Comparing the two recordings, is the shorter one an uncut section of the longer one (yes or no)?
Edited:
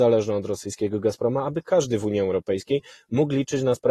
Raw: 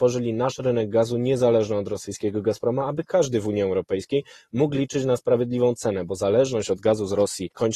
yes